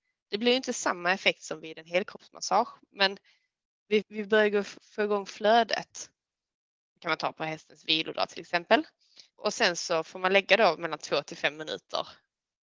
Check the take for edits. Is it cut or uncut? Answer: cut